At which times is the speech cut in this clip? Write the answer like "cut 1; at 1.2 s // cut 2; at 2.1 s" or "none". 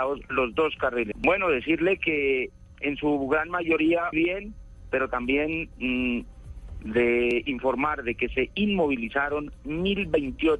cut 1; at 1.1 s // cut 2; at 4.1 s // cut 3; at 6.8 s